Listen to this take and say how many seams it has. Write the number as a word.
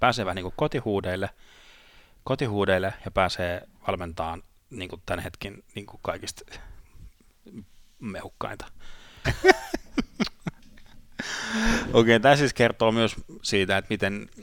one